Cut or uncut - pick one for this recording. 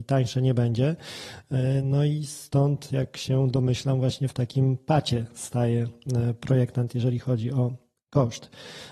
uncut